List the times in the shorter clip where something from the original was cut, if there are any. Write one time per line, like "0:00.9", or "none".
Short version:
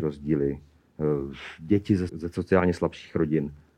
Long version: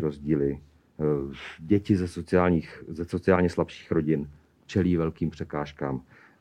0:02.1